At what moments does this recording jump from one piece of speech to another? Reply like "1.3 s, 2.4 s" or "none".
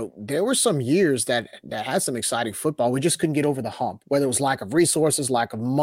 none